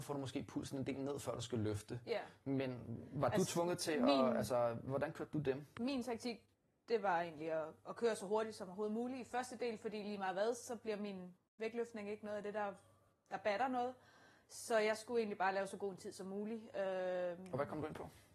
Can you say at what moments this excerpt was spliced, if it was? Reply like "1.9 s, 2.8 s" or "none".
none